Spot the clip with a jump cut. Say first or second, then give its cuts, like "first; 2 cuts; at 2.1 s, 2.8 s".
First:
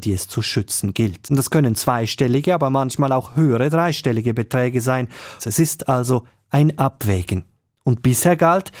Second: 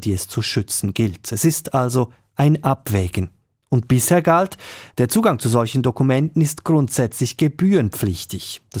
first; 2 cuts; at 1.2 s, 5.4 s